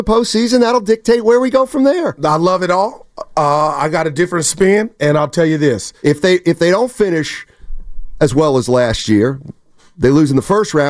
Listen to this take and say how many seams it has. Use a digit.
1